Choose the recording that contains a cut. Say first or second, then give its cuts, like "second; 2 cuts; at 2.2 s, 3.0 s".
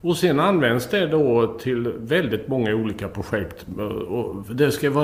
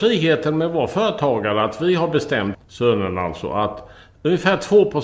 second; 1 cut; at 2.5 s